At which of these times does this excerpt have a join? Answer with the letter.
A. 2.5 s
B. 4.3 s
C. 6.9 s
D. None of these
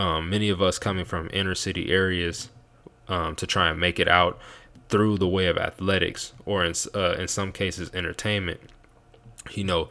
D